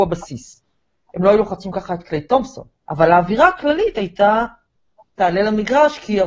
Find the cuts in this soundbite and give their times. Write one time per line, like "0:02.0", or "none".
0:02.8